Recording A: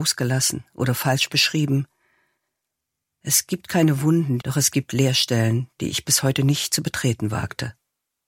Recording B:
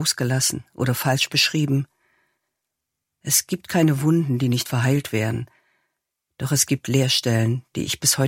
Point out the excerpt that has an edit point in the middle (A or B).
A